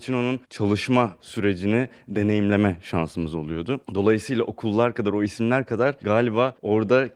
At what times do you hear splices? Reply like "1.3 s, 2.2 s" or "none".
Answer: none